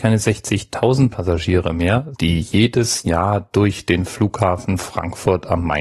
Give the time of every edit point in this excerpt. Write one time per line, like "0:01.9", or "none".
0:02.1

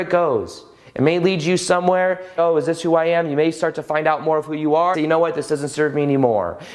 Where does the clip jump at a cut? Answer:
0:02.4
0:04.9

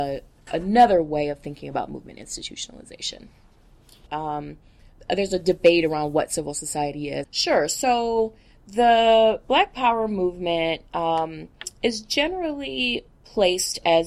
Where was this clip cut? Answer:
0:04.1
0:07.2

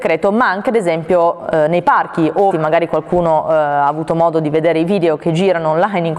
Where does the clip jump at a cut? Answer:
0:02.5

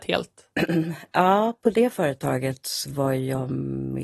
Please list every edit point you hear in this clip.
none

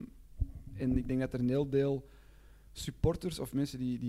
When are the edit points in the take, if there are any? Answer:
none

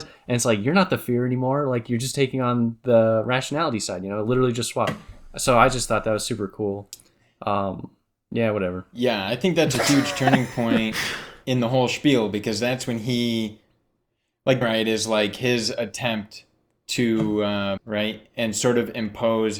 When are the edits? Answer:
0:14.6
0:17.8

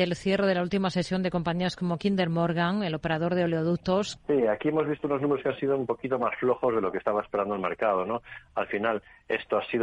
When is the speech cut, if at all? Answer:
0:04.2

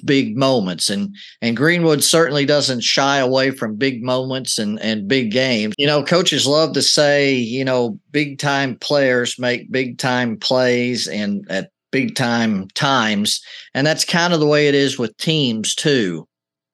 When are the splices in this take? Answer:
0:05.7

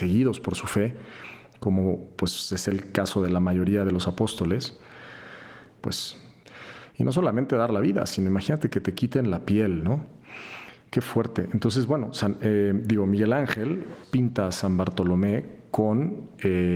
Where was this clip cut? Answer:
0:05.8
0:14.0

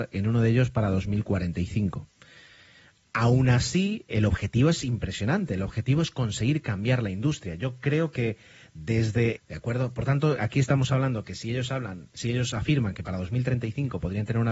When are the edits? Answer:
0:09.4
0:10.4

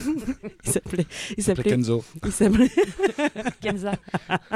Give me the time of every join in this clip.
none

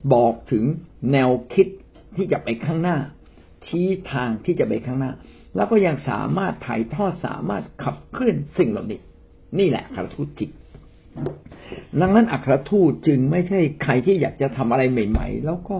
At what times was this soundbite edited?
none

